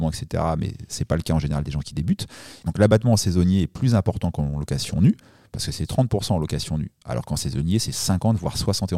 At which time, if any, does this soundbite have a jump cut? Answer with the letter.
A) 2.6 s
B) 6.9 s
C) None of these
A